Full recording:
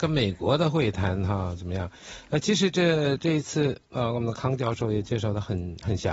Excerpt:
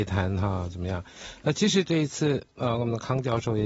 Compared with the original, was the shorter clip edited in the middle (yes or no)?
yes